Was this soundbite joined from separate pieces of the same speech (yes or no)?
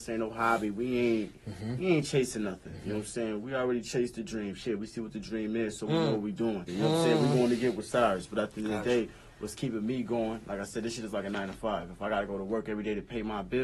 yes